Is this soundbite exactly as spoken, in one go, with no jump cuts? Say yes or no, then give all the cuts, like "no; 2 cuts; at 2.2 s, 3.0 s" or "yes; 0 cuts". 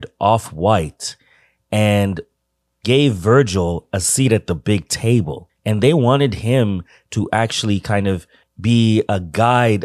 yes; 0 cuts